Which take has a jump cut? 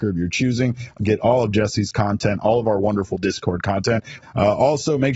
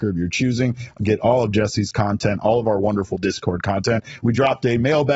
first; 1 cut; at 4.2 s

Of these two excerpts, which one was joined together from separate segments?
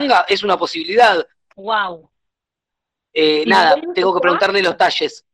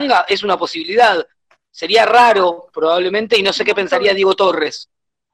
first; 1 cut; at 1.5 s

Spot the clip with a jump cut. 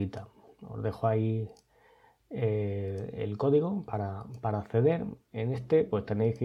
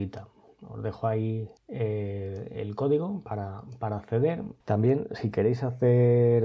second; 2 cuts; at 1.6 s, 4.6 s

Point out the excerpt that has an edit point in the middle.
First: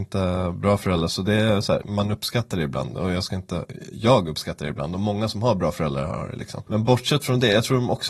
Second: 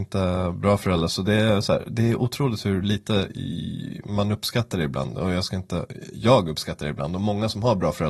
first; 1 cut; at 1.8 s

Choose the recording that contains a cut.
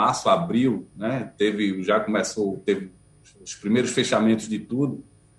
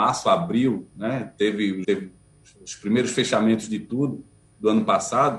second; 1 cut; at 1.8 s

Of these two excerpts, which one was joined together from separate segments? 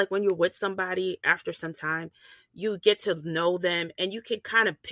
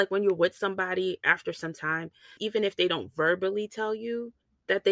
second; 1 cut; at 2.4 s

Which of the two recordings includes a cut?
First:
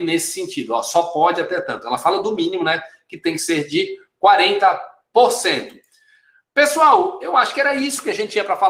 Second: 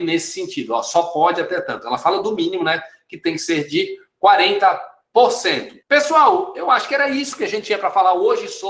second; 1 cut; at 5.8 s

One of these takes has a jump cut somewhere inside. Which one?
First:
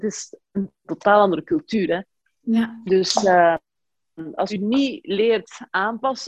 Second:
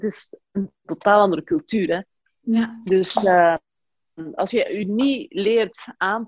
first; 1 cut; at 4.5 s

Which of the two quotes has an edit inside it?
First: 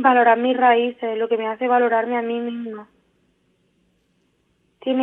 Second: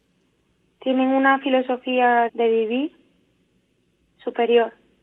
second; 1 cut; at 2.3 s

